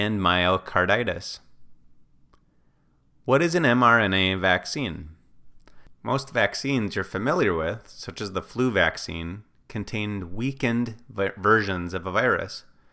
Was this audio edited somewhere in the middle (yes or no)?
no